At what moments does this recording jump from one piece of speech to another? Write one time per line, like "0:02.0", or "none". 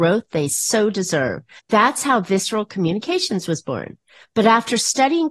0:01.6
0:04.2